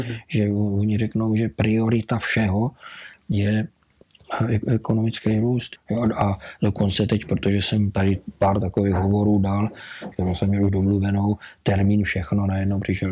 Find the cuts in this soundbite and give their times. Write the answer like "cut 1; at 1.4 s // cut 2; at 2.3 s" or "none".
cut 1; at 5.8 s // cut 2; at 10.1 s

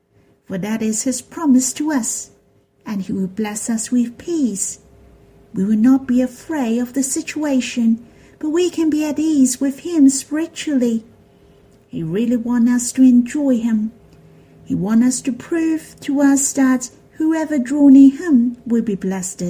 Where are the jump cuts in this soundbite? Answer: none

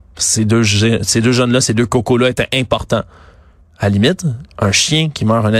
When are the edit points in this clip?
cut 1; at 3.6 s

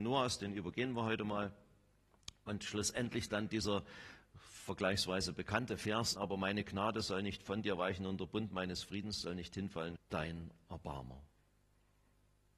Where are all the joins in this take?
cut 1; at 6.2 s // cut 2; at 10.0 s

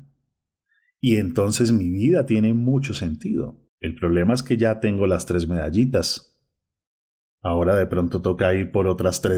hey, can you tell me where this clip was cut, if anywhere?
cut 1; at 3.7 s

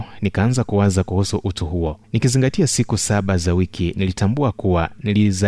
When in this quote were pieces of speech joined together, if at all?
cut 1; at 2.0 s

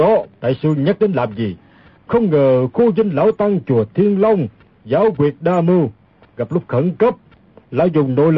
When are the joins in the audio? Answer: cut 1; at 2.0 s

